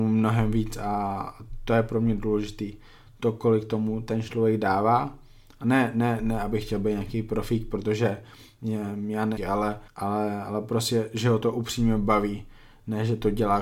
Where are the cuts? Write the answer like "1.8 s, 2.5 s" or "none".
9.4 s

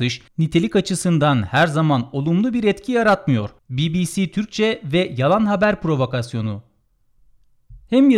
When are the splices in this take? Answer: 3.6 s

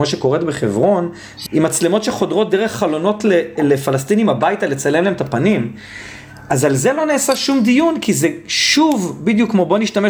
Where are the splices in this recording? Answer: 1.5 s

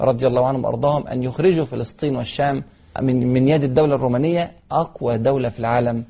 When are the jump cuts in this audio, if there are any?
3.0 s

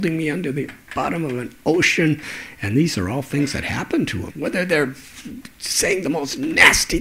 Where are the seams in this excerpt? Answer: 4.3 s

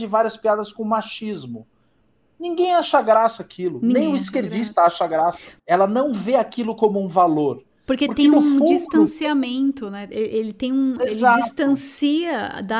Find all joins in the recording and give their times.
5.6 s, 7.8 s

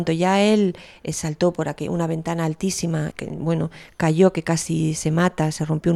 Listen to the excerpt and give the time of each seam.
3.1 s

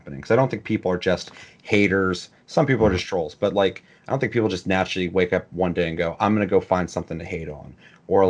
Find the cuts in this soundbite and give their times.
none

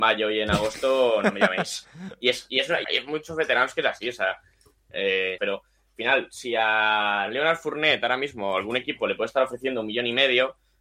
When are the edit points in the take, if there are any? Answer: 2.8 s, 5.4 s

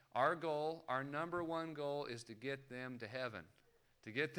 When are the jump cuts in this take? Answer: none

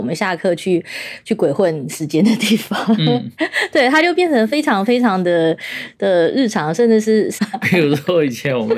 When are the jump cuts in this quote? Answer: 7.4 s

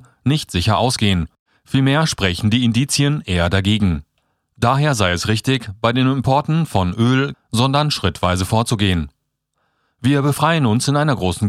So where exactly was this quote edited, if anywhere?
7.3 s

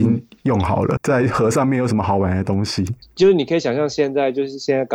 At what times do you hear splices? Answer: 1.0 s, 3.0 s

